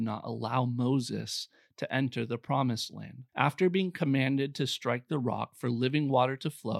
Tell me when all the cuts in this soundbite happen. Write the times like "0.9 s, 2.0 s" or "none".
3.3 s